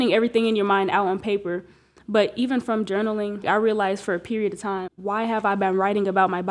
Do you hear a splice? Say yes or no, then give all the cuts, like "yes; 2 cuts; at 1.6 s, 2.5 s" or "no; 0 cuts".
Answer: yes; 2 cuts; at 3.4 s, 4.9 s